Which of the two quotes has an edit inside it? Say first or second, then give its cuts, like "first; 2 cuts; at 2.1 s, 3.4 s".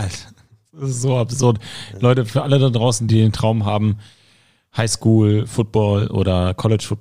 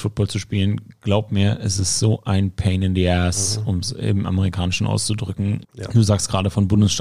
second; 1 cut; at 5.6 s